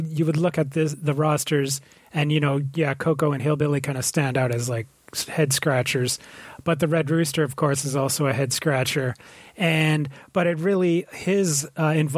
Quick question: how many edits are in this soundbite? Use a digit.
0